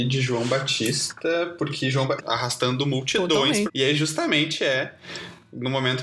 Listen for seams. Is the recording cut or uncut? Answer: cut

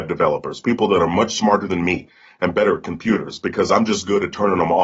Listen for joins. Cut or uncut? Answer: uncut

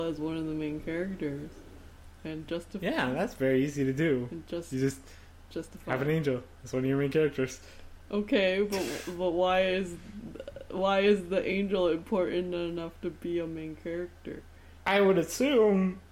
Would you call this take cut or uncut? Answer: cut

